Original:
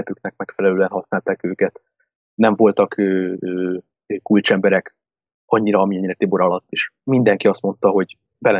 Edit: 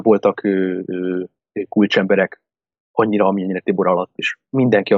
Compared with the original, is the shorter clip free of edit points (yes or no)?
yes